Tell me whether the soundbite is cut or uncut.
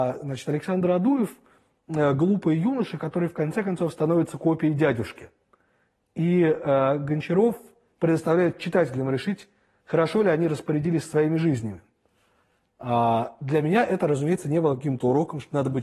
uncut